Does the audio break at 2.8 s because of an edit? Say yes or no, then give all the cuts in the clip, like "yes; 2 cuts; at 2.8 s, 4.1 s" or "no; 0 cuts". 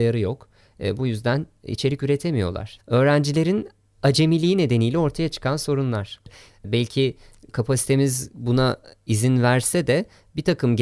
yes; 2 cuts; at 2.8 s, 6.5 s